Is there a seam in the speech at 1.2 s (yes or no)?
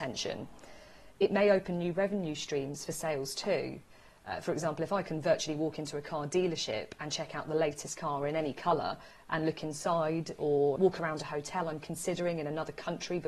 no